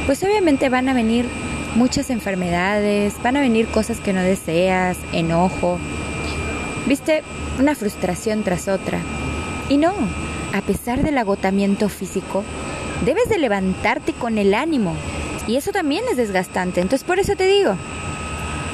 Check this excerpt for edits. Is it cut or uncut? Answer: cut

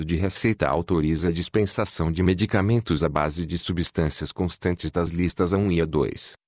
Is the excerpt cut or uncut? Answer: uncut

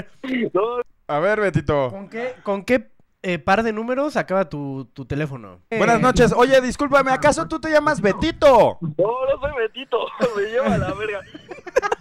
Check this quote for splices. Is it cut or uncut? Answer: cut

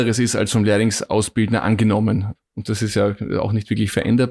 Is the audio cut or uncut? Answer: cut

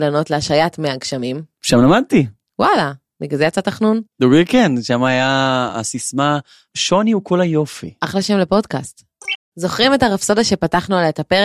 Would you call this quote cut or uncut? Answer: cut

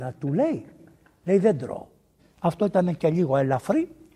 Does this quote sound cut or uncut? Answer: cut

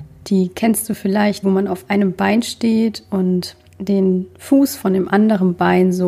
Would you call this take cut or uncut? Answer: cut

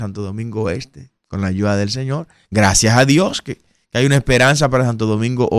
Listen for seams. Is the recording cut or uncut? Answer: uncut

